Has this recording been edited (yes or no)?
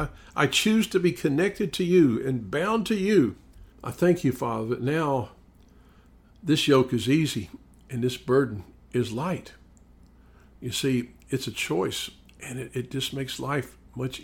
yes